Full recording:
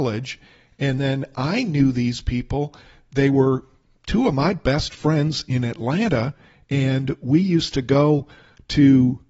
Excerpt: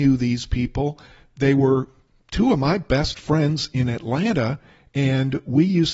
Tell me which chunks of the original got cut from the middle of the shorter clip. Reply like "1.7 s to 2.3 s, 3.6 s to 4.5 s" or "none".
none